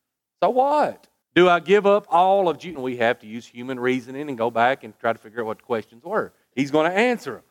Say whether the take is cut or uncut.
cut